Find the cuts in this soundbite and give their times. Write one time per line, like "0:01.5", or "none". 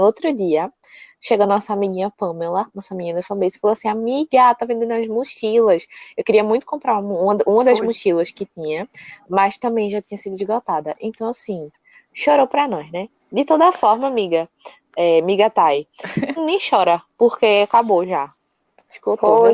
0:16.4